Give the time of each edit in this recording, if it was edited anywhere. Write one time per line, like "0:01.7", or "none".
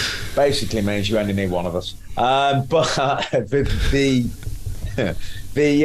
none